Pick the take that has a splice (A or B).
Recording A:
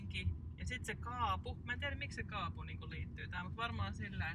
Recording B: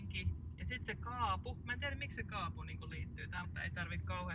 B